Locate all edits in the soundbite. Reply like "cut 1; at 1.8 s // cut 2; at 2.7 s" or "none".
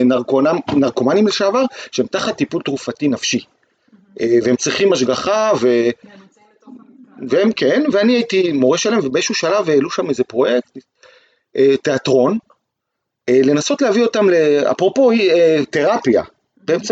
none